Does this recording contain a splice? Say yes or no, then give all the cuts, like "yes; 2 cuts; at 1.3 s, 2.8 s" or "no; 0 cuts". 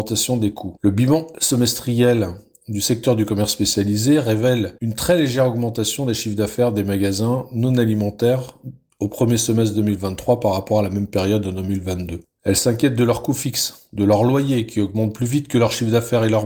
yes; 1 cut; at 12.2 s